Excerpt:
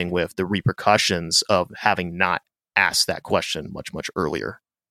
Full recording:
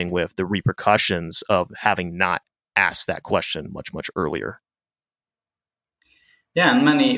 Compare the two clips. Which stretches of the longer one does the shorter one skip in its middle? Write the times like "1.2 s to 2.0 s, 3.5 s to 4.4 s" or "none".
none